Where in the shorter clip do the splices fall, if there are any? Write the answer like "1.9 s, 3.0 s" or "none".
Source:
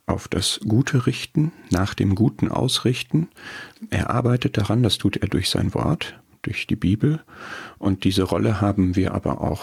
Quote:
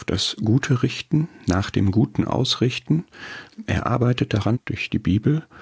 4.5 s

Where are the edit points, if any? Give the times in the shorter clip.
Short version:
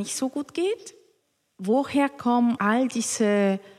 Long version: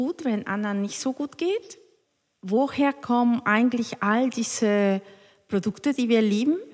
2.6 s

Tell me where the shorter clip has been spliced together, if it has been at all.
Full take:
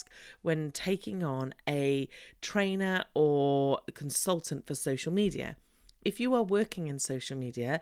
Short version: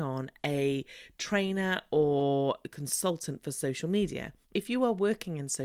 4.4 s

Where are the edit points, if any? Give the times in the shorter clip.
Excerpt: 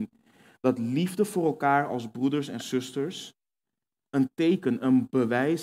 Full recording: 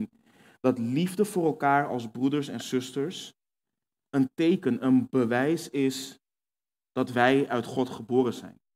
none

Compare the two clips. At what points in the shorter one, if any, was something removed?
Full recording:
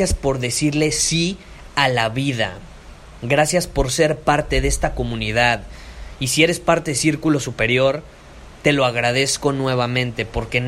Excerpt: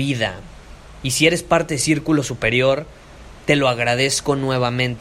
1.0 s

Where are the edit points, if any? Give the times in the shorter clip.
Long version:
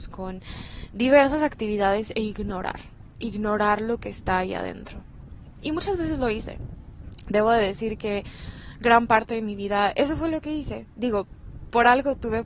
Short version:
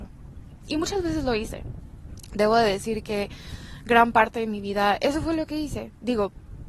none

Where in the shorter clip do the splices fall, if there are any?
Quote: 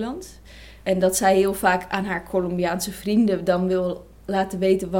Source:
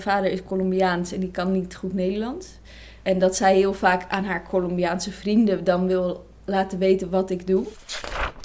none

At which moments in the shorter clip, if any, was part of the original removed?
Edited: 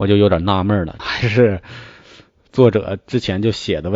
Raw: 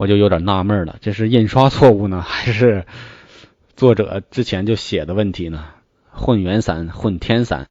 1.0 s

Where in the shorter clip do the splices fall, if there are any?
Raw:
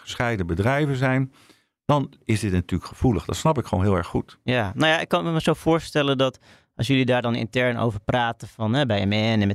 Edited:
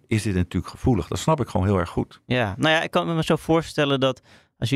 none

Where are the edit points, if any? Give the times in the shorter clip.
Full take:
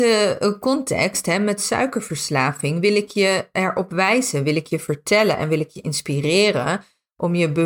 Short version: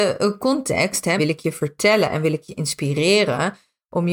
1.2 s

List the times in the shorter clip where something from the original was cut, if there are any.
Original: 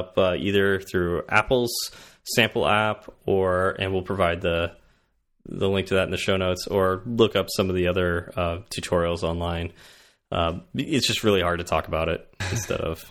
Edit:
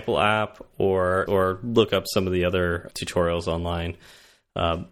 1.3 s, 2.9 s

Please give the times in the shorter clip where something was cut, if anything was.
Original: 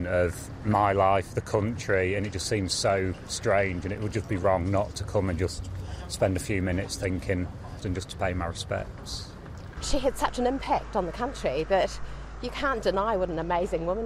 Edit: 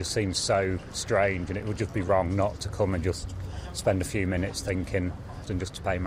none

